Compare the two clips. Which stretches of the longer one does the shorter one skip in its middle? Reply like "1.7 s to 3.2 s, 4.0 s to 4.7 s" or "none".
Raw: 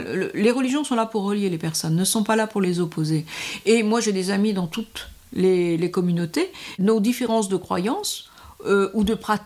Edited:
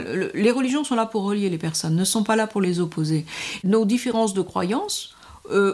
3.6 s to 6.8 s